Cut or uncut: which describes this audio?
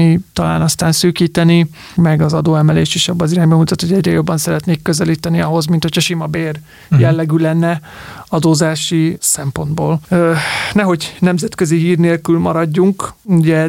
uncut